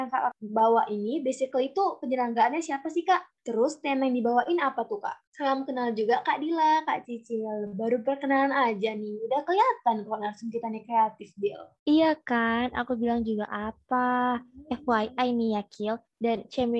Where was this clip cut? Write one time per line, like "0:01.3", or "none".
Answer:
0:05.3